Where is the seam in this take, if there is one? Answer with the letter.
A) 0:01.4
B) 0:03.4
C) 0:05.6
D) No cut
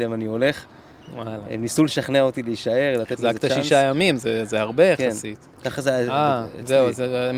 C